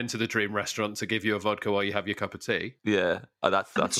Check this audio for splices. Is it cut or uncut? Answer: cut